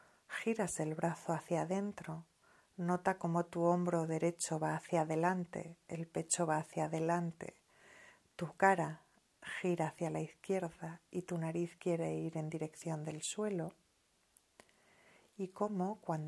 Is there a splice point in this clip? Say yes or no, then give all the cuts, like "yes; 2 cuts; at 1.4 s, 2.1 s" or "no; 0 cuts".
no; 0 cuts